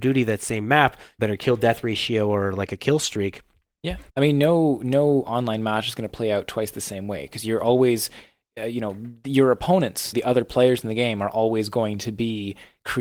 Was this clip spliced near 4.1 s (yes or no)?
yes